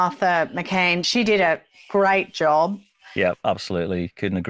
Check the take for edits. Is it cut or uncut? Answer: uncut